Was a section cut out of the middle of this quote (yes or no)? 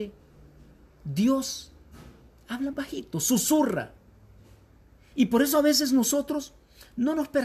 yes